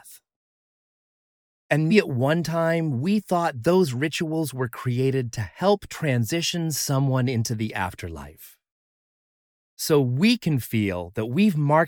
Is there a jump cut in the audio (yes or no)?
yes